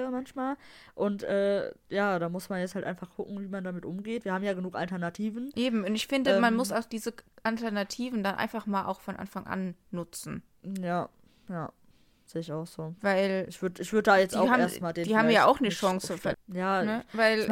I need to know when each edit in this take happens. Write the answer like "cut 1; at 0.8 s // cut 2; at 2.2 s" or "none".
cut 1; at 16.3 s